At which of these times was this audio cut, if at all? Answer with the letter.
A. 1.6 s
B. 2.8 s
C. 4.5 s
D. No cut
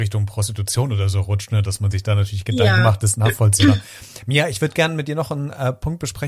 D